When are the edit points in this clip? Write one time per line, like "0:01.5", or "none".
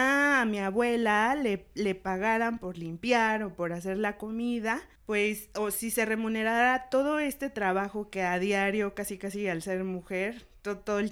0:05.0